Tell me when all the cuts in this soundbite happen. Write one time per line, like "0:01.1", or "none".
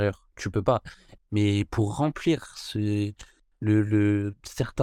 0:01.2